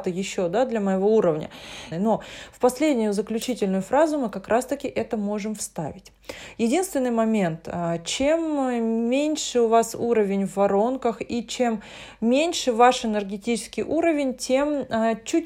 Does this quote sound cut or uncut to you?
cut